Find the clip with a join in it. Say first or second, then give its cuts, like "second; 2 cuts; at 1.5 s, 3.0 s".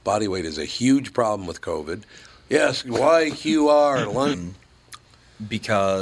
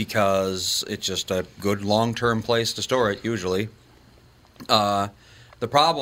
first; 2 cuts; at 2.3 s, 4.3 s